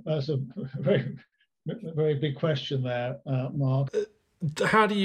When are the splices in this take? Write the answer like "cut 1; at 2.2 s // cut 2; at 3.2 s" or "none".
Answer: cut 1; at 3.9 s